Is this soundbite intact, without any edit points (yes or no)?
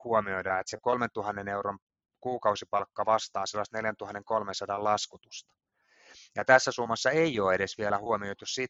yes